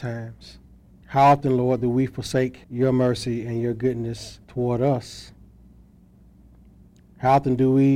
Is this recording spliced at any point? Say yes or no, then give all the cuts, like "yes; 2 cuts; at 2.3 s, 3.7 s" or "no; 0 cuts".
yes; 3 cuts; at 1.0 s, 2.6 s, 4.4 s